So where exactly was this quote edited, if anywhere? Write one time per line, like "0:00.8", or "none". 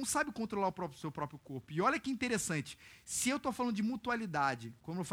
none